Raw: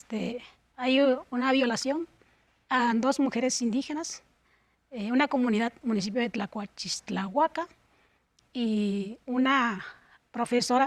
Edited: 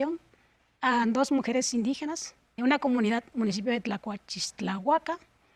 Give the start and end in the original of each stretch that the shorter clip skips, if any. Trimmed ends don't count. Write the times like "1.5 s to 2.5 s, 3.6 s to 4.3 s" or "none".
4.5 s to 5.1 s

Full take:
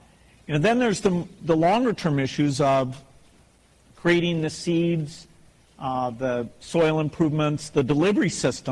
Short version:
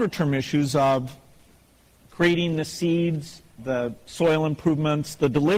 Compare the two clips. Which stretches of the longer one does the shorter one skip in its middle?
5.4 s to 6.1 s

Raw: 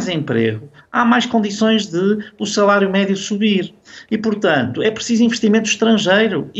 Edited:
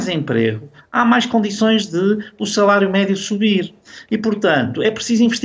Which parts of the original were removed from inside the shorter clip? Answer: none

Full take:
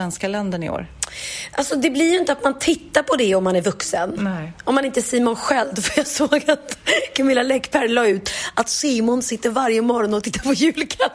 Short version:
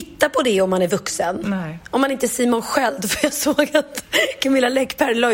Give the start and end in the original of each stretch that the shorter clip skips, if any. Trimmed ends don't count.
none

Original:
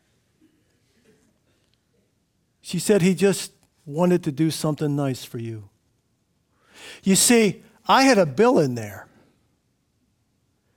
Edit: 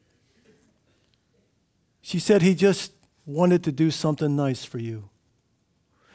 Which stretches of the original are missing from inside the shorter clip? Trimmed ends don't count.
none

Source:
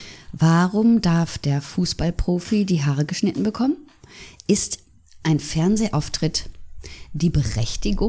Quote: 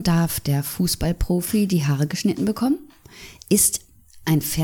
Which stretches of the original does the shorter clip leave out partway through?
none

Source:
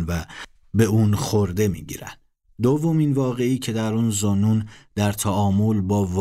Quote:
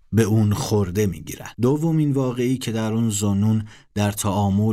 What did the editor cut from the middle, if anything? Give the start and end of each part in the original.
2.2 s to 2.6 s

